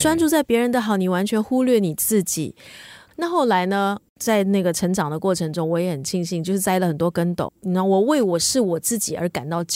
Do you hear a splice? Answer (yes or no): yes